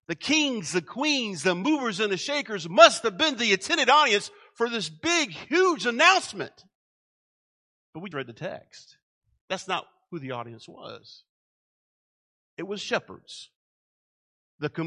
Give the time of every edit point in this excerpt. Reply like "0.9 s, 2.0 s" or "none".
8.1 s